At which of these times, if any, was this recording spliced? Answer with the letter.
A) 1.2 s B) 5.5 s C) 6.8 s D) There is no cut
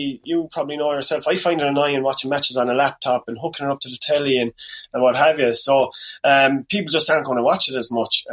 D